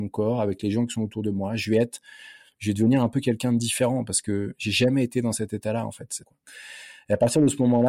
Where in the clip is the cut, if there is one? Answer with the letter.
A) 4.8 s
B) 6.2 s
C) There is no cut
B